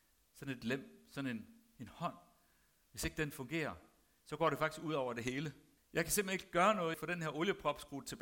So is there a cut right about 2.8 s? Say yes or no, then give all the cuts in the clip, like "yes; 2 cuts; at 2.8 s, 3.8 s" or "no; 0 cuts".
no; 2 cuts; at 5.8 s, 6.9 s